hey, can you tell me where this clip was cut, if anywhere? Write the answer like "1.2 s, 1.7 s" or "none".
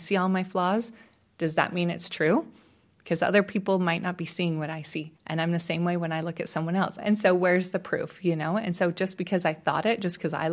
5.2 s, 7.0 s